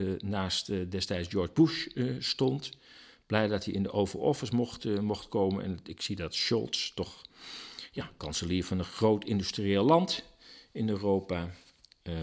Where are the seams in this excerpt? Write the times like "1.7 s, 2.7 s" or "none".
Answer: none